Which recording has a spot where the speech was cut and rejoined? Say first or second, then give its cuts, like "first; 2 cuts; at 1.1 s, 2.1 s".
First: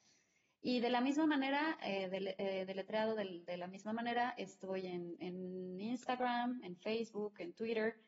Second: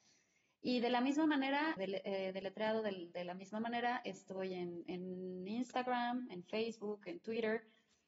second; 1 cut; at 1.8 s